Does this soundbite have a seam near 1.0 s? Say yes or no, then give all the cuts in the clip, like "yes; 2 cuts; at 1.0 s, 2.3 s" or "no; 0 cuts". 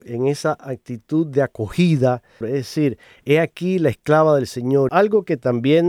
no; 2 cuts; at 2.4 s, 4.9 s